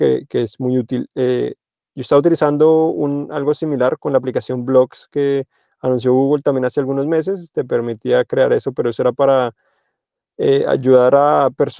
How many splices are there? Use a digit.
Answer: 0